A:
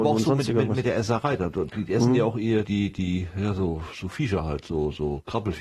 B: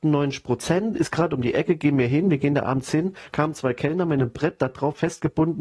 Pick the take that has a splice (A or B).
A